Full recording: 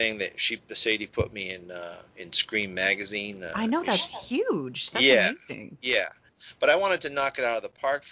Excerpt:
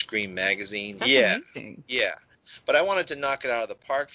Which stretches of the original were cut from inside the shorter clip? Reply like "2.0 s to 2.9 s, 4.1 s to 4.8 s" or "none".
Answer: 3.4 s to 4.9 s